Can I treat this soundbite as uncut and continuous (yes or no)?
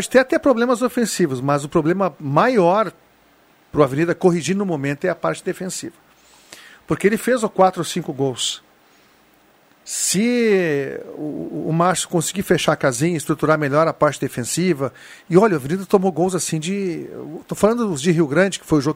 yes